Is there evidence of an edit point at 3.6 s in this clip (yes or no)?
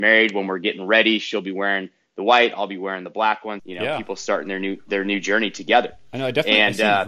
yes